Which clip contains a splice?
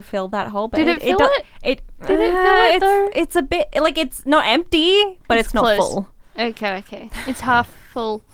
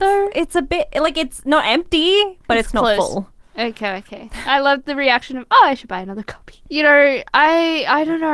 second; 2 cuts; at 4.5 s, 6.6 s

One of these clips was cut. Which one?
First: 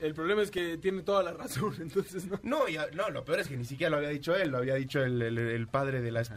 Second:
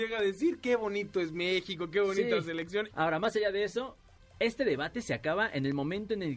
second; 2 cuts; at 2.9 s, 4.2 s

